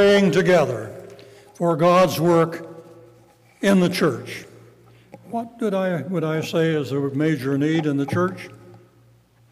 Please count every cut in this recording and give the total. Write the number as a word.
zero